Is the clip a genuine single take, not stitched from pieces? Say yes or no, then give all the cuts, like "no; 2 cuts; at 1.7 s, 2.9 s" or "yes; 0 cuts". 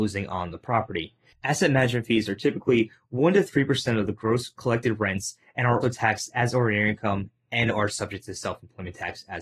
no; 2 cuts; at 1.3 s, 5.8 s